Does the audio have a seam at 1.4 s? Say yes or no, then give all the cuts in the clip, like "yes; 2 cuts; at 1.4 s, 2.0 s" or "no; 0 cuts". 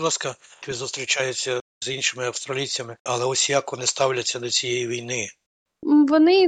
no; 1 cut; at 3.1 s